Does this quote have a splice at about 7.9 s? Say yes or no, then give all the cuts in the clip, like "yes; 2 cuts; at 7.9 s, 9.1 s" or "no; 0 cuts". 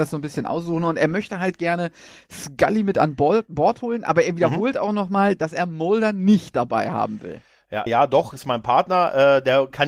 yes; 1 cut; at 7.9 s